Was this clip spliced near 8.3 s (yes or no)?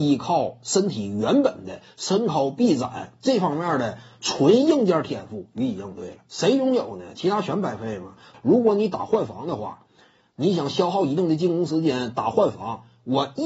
yes